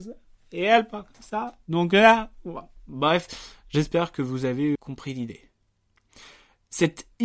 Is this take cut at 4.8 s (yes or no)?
yes